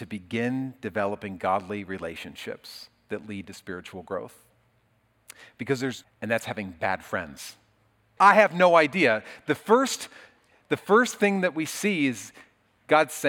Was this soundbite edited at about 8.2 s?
yes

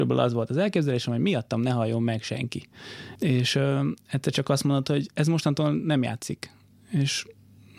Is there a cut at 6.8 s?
no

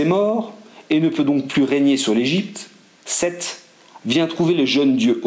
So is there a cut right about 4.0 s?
yes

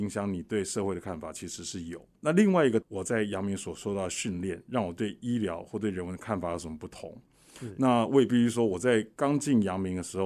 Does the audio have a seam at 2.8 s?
yes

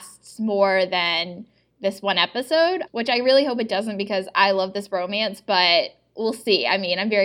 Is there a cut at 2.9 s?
yes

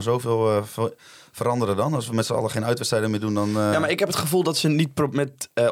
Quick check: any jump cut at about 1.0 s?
no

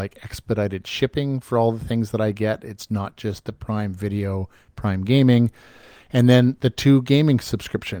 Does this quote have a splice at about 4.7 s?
yes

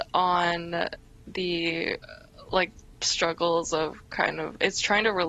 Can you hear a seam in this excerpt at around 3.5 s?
no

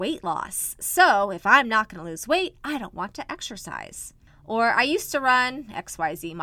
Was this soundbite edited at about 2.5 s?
no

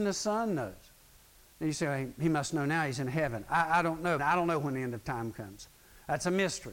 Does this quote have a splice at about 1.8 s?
no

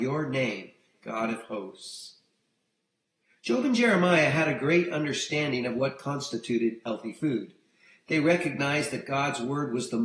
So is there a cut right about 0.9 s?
yes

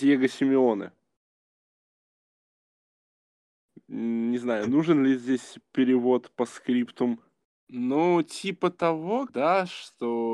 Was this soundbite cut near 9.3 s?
yes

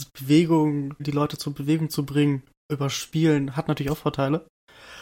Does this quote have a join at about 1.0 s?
yes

